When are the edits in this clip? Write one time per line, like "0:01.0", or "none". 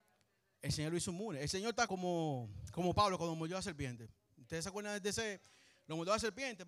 0:01.9

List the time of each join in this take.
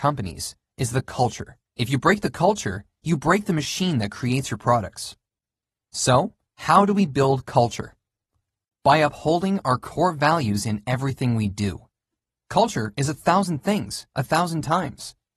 0:01.7

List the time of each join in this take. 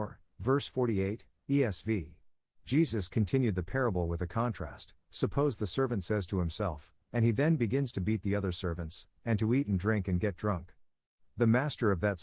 0:02.5
0:07.0
0:09.2

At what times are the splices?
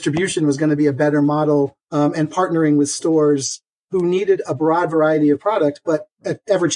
0:01.8

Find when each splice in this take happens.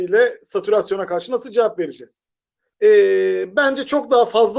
0:02.7

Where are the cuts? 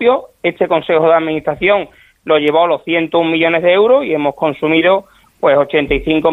none

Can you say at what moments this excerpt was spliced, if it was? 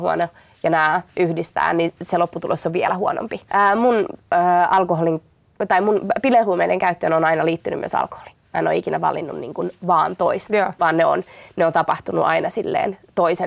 0:03.5

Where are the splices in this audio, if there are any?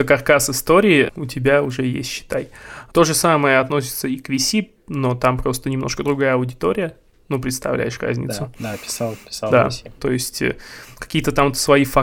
0:10.0

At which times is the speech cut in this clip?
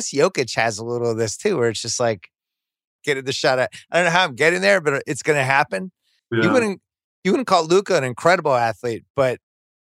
0:03.0
0:06.2

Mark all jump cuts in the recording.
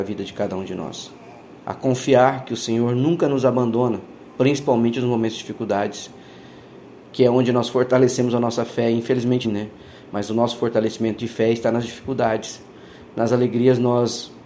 0:09.4

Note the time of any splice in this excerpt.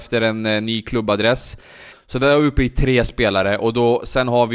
0:01.9

